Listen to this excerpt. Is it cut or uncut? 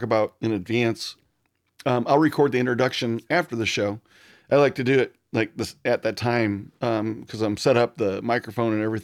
uncut